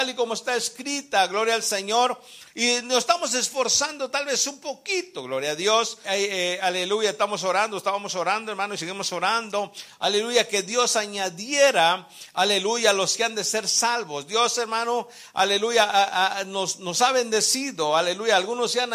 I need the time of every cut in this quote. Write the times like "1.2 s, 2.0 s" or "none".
6.0 s